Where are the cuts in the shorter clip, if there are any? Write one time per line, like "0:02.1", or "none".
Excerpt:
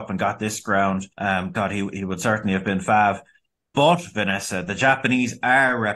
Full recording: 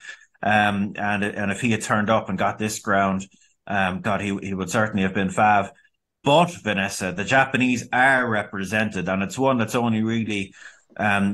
0:01.1